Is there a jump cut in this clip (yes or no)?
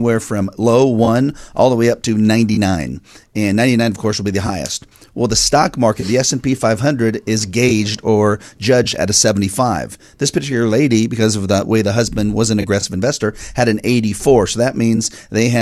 no